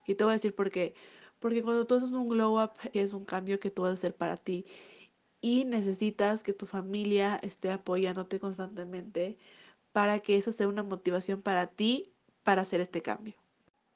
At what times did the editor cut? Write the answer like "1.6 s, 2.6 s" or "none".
2.9 s